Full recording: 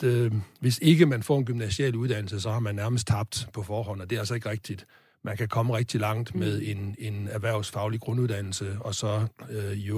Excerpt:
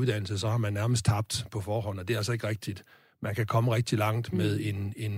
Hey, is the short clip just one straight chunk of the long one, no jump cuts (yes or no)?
yes